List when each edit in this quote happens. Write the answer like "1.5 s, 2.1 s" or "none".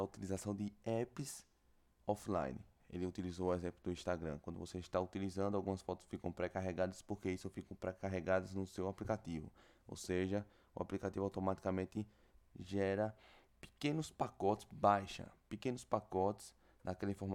none

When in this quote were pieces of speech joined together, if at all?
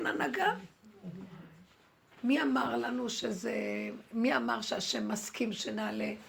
none

